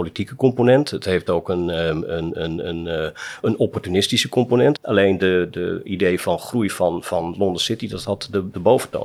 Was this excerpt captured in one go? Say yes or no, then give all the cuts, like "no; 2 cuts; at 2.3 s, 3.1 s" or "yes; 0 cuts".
no; 1 cut; at 4.8 s